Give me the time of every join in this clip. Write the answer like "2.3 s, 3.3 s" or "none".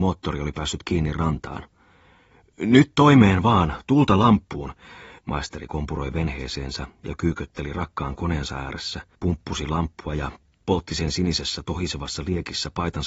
5.2 s, 9.1 s

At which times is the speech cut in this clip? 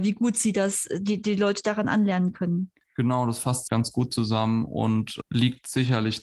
3.7 s

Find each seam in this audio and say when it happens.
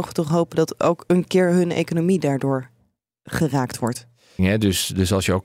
4.4 s

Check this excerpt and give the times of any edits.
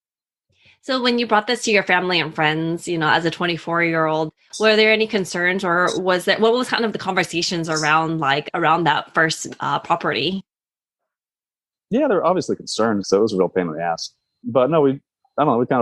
13.0 s

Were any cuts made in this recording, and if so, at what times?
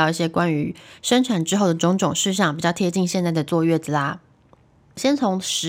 none

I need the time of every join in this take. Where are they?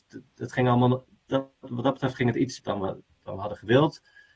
2.6 s

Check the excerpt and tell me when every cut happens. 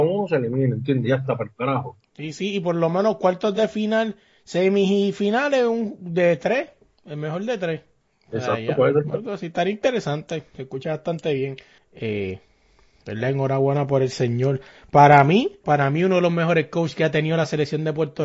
11.8 s, 15.6 s

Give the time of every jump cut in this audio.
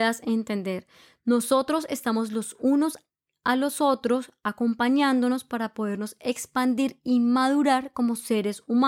none

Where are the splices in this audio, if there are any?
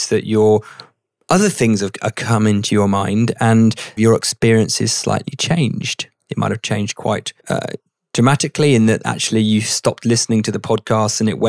4.0 s, 7.4 s

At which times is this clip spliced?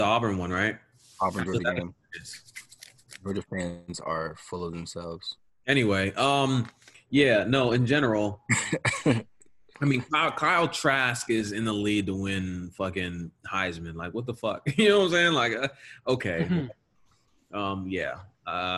none

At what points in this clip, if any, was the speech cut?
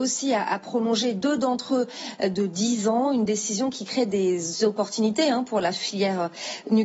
none

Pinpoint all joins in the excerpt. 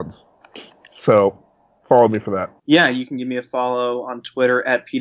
2.6 s

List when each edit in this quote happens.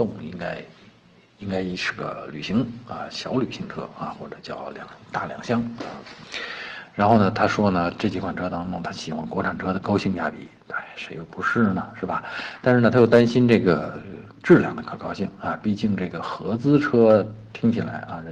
none

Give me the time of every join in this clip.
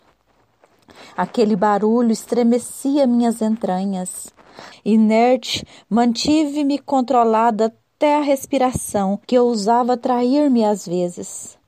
4.7 s, 9.2 s

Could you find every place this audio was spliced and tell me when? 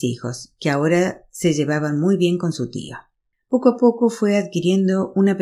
3.3 s

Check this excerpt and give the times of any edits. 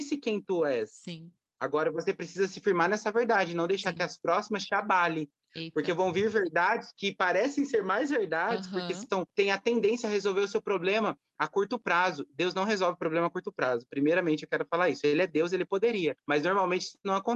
none

